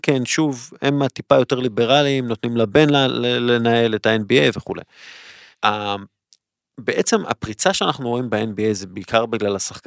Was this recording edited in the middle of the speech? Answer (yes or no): yes